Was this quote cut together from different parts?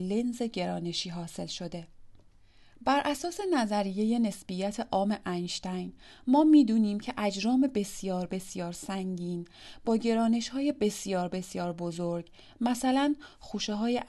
no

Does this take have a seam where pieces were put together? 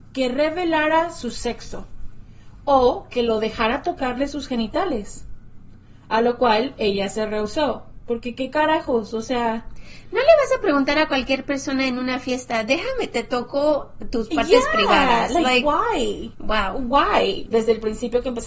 yes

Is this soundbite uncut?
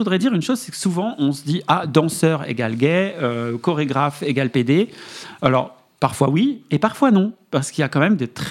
yes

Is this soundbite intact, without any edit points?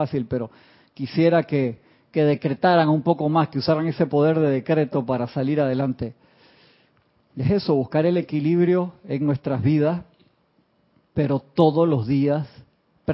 yes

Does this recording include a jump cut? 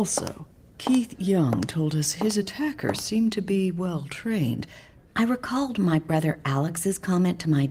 yes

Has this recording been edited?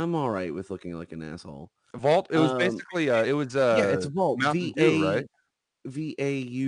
no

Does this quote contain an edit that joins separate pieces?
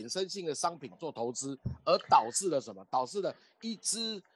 no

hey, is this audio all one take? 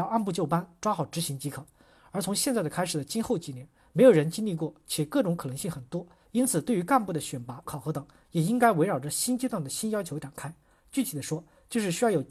no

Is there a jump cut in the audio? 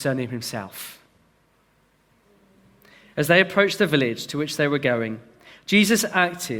no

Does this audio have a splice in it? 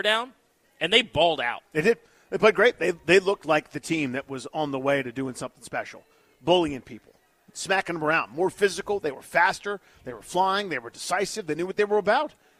no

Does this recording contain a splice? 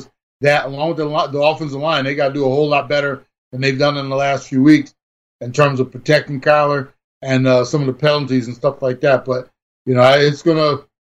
no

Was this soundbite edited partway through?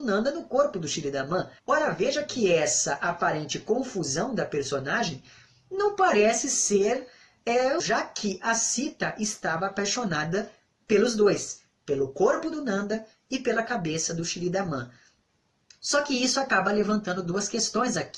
yes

